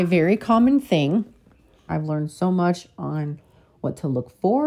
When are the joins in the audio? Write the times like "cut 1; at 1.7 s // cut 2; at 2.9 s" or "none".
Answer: cut 1; at 1.9 s